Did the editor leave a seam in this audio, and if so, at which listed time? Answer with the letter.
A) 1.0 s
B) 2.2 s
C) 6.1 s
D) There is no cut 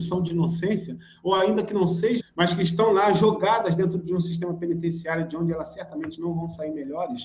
B